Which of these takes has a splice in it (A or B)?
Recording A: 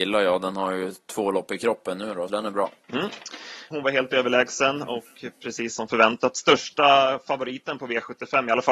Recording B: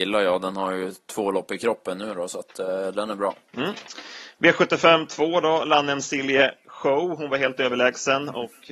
A